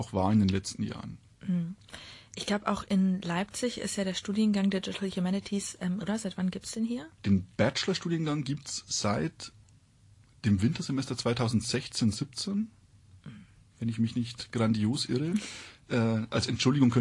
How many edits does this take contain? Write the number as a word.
two